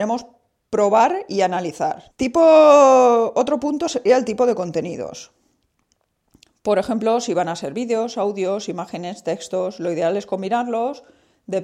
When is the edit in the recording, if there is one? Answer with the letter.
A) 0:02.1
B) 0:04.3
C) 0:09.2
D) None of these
A